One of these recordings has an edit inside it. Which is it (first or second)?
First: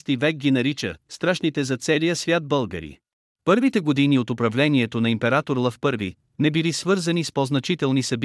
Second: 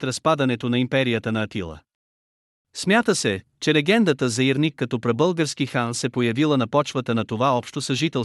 first